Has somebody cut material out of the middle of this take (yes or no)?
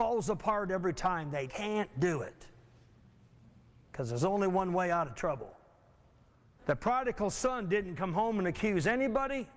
yes